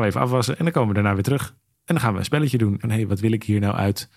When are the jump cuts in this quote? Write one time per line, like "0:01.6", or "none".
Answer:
0:02.8

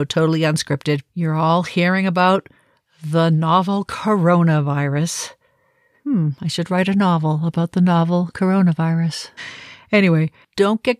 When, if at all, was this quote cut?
0:09.4

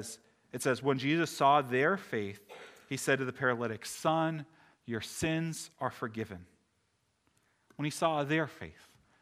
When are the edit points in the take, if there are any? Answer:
none

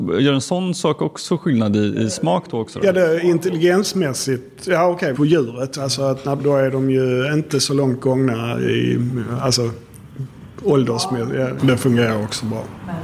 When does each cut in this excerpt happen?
0:05.1
0:06.4
0:11.6

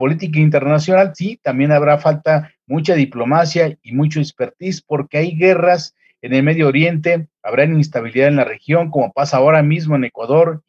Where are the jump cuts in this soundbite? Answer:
0:01.1

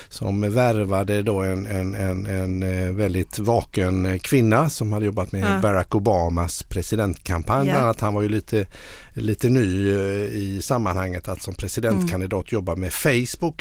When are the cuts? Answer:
none

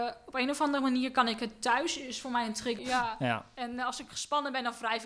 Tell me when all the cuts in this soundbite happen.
0:02.8

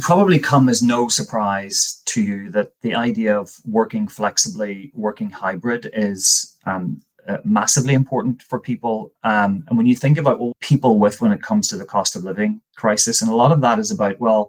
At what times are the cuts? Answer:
0:10.5

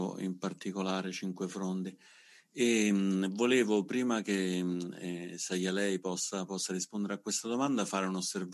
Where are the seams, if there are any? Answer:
none

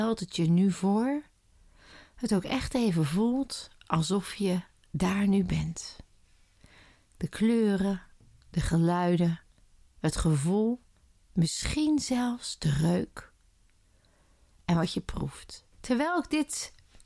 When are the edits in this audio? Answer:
0:15.7

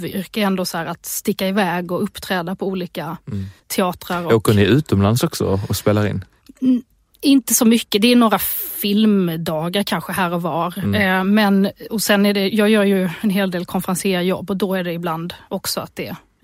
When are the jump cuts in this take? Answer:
0:03.6

